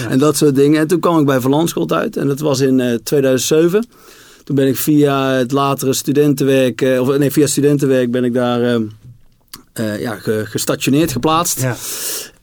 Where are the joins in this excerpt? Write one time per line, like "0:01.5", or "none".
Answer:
none